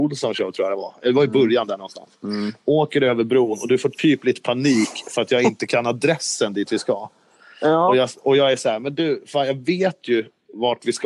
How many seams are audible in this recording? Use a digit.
0